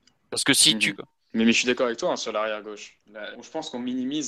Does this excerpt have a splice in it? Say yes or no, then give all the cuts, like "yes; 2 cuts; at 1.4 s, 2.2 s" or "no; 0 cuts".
yes; 2 cuts; at 1.0 s, 3.3 s